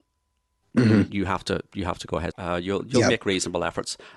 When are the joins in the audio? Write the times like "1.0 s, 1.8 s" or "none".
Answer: 2.3 s